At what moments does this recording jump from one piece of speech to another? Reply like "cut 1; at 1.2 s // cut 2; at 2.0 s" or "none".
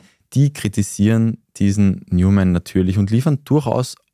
none